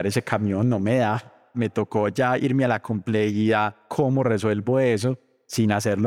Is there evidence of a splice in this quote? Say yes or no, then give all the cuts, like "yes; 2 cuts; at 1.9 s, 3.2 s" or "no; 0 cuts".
yes; 1 cut; at 1.5 s